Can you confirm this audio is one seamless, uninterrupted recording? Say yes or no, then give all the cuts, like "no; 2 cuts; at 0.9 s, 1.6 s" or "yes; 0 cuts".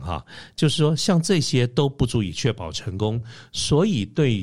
yes; 0 cuts